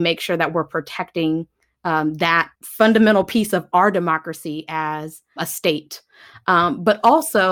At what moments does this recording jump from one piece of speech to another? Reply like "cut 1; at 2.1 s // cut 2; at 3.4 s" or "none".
cut 1; at 2.5 s // cut 2; at 5.4 s